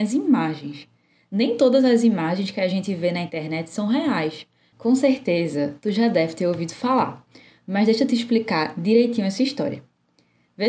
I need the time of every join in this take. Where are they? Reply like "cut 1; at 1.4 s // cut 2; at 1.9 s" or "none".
cut 1; at 4.7 s